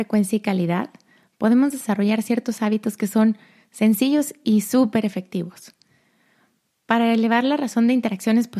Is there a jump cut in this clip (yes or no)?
no